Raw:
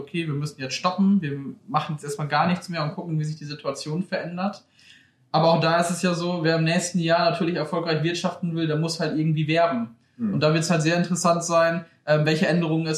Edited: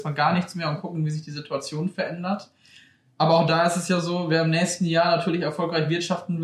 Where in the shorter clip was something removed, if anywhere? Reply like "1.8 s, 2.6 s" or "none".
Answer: none

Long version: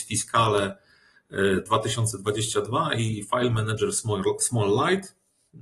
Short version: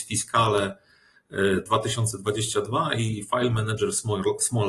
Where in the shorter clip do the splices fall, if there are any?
none

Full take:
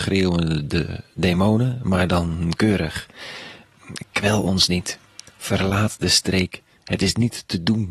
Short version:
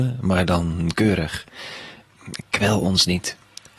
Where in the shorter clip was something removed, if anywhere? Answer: none

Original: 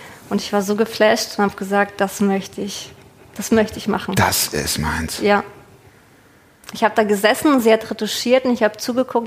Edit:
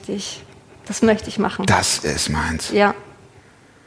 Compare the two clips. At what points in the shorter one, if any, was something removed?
none

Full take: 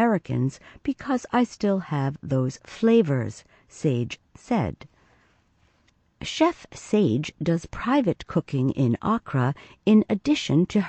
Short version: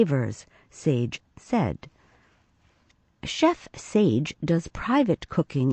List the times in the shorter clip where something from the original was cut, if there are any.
none

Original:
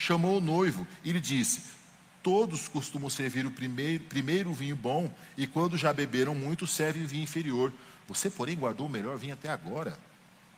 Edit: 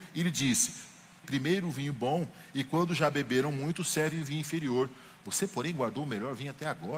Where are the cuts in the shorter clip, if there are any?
1.2 s

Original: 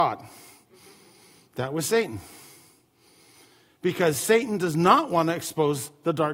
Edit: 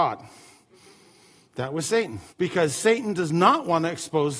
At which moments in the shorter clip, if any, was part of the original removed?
2.3 s

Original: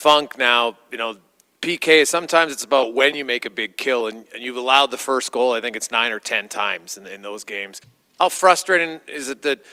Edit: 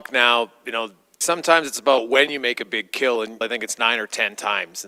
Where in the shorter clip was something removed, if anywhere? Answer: 1.2 s, 3.4 s

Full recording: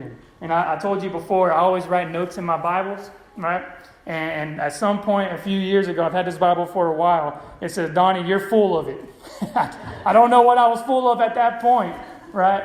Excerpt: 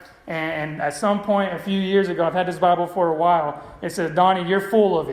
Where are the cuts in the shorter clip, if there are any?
none

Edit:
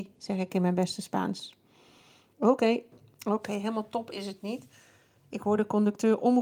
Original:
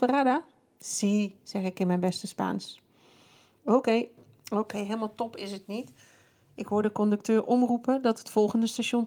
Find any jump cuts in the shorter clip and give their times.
none

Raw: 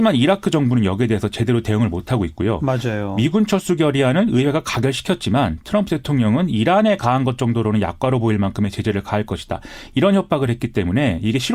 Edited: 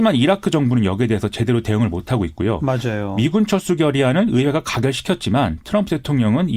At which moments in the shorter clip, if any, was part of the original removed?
none

